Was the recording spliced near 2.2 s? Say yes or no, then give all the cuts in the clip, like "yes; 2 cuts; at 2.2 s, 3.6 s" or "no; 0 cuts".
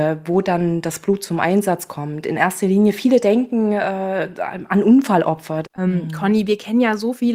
no; 1 cut; at 5.6 s